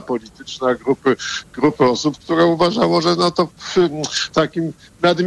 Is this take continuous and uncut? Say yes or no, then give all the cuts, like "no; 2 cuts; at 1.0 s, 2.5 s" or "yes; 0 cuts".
no; 1 cut; at 4.3 s